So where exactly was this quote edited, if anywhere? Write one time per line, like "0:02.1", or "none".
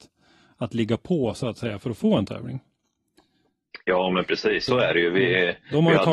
0:04.7